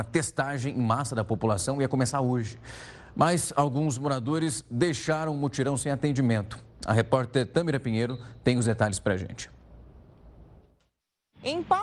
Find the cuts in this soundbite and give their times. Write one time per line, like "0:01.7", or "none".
none